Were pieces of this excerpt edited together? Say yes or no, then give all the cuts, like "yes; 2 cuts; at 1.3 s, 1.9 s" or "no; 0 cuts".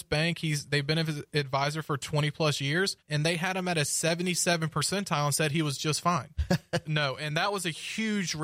yes; 2 cuts; at 3.0 s, 6.8 s